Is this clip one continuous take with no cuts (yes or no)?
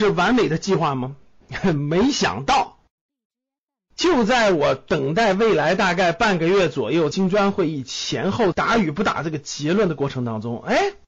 yes